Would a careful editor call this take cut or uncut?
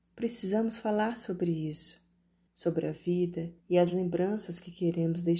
cut